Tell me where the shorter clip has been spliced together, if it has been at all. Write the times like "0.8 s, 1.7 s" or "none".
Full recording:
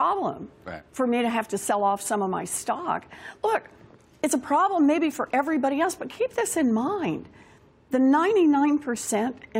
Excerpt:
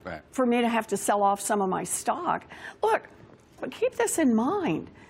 3.6 s